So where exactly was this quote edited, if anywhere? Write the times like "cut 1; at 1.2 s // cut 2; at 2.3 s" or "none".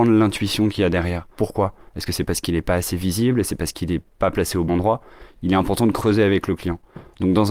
cut 1; at 1.3 s // cut 2; at 4.7 s